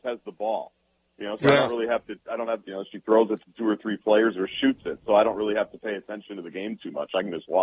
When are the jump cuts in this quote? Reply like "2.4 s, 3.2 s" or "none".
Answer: 2.6 s